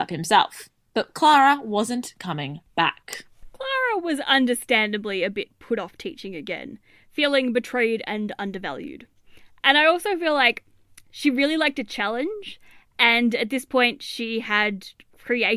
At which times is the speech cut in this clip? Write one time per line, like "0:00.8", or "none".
none